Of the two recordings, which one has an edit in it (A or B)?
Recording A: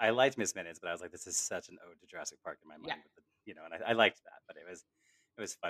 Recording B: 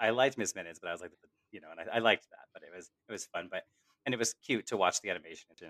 B